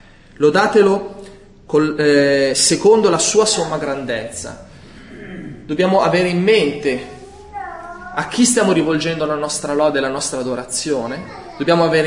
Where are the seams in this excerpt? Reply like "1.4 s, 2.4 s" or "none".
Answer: none